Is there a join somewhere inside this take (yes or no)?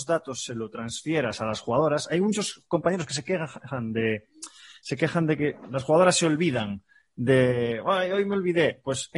no